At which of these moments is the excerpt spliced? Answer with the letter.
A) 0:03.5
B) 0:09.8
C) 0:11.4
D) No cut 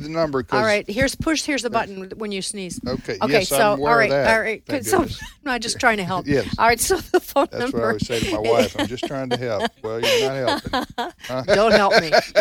C